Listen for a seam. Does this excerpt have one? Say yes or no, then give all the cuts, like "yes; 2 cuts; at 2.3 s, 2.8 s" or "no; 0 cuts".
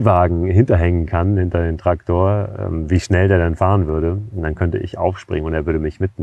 no; 0 cuts